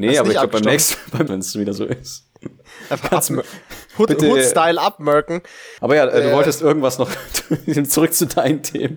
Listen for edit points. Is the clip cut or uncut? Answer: cut